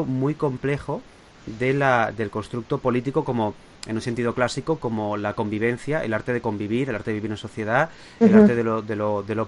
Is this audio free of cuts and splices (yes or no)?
yes